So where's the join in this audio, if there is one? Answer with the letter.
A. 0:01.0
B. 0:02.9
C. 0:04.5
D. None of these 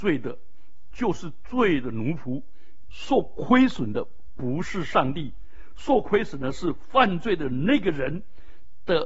B